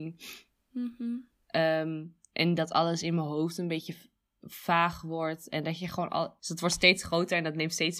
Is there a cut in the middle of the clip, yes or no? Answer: no